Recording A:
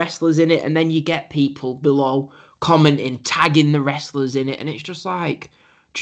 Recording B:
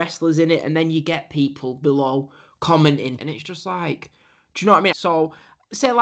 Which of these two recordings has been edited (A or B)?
B